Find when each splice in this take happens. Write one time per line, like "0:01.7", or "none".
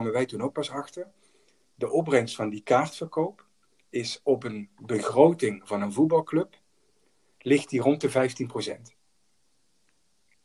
none

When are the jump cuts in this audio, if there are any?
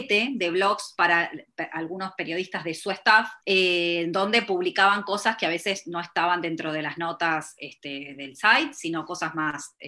0:03.4

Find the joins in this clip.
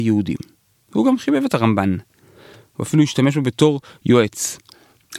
none

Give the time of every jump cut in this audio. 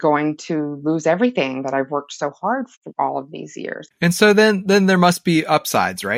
0:03.9

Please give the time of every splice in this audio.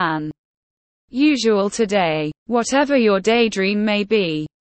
0:02.4

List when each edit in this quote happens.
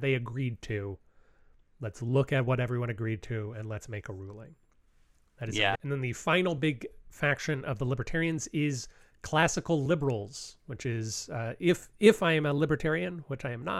0:05.8

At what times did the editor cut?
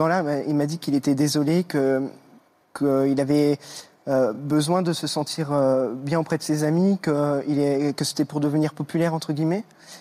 none

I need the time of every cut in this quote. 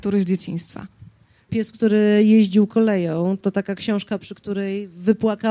0:01.5
0:03.4

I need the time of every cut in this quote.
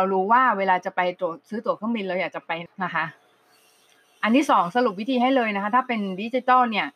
0:02.7

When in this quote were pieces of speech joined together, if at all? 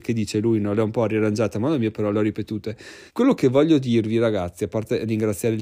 0:03.1

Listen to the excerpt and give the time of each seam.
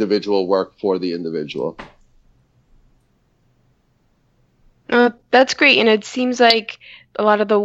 none

